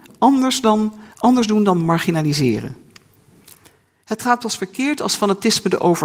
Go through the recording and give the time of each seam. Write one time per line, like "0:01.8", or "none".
0:01.1